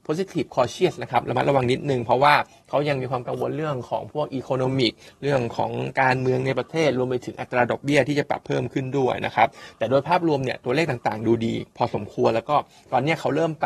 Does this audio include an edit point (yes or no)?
yes